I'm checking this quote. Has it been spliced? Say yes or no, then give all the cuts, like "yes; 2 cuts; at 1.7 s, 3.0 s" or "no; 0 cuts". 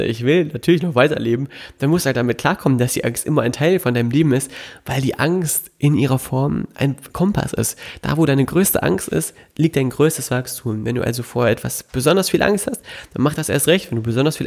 no; 0 cuts